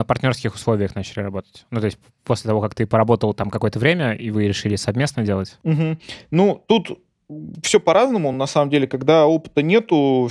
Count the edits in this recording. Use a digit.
0